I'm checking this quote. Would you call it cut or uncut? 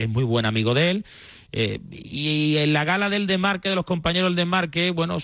uncut